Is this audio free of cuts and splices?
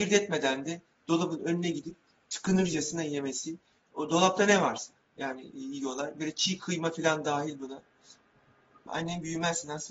no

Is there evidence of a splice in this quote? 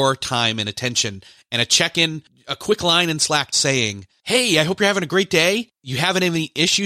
yes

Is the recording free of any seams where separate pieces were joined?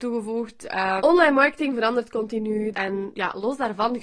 no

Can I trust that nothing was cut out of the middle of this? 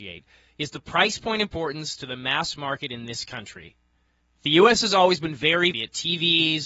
no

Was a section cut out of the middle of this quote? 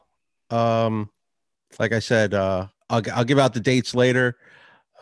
no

